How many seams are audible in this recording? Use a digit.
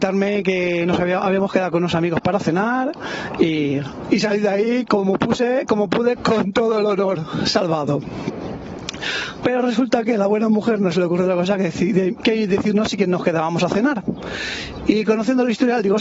2